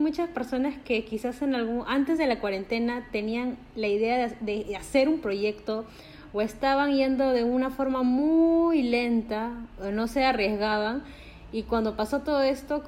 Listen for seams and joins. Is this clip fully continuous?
yes; 0 cuts

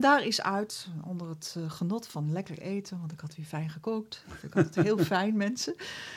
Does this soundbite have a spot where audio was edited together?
no; 0 cuts

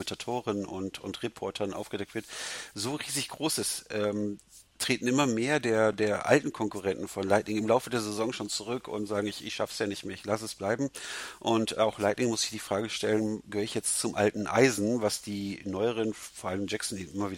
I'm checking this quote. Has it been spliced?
no; 0 cuts

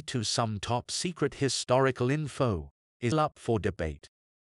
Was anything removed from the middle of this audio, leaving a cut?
yes; 1 cut; at 3.1 s

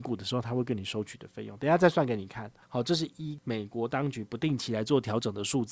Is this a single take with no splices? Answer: no; 1 cut; at 2.6 s

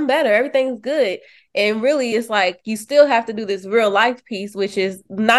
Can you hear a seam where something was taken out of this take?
no; 0 cuts

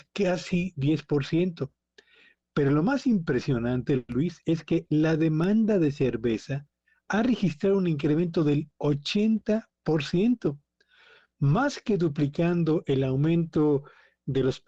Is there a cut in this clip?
no; 0 cuts

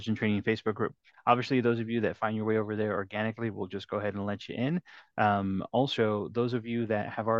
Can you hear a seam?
no; 0 cuts

